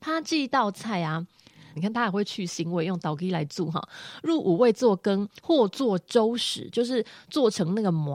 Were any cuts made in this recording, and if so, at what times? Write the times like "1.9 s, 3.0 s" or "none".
1.8 s